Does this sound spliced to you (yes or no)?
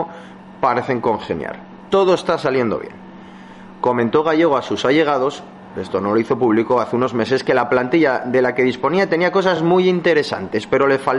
no